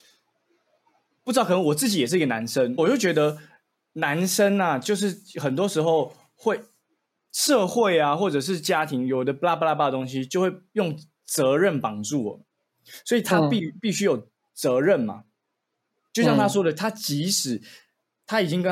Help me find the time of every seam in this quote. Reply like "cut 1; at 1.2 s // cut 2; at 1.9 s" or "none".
cut 1; at 2.8 s